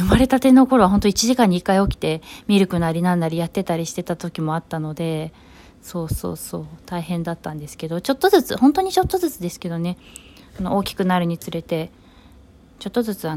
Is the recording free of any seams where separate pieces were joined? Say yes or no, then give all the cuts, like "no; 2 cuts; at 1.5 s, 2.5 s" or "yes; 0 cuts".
yes; 0 cuts